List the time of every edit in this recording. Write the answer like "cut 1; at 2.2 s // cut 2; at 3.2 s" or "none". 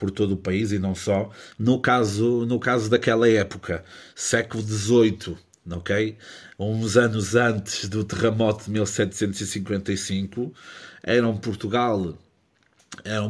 none